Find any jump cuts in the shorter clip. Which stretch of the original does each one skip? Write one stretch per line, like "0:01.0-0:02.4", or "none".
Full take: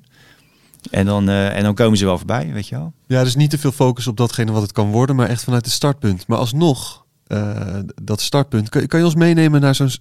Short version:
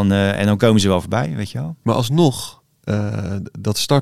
0:03.0-0:06.3